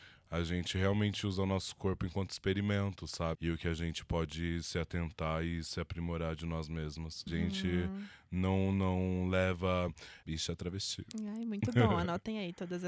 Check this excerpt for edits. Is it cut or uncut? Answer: cut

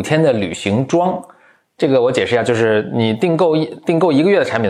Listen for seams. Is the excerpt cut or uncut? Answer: uncut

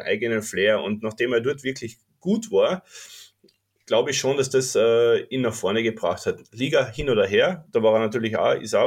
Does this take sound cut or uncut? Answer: uncut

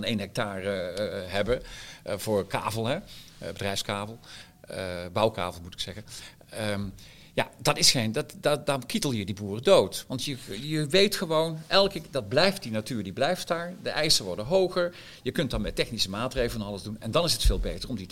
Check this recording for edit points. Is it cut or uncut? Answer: uncut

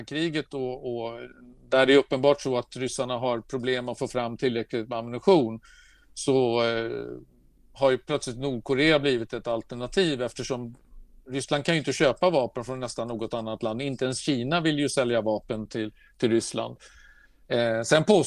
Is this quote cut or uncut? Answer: uncut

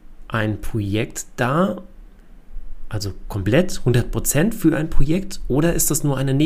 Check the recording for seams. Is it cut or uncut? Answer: uncut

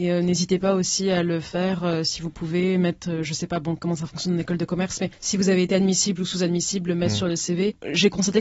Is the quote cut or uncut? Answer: uncut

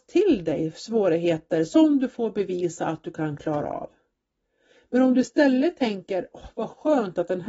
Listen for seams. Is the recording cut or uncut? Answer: uncut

